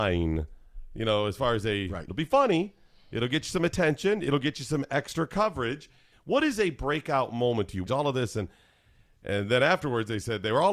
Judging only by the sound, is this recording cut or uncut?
cut